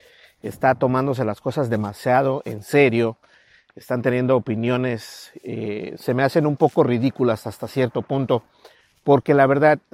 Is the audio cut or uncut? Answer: uncut